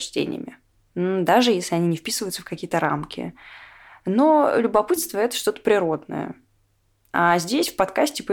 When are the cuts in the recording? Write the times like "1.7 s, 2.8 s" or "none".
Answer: none